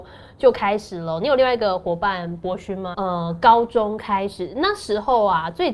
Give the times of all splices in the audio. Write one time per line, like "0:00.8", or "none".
0:02.9